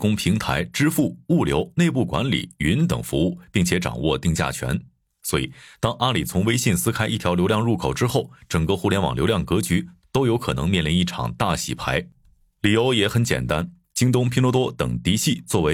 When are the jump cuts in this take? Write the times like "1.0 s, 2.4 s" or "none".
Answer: none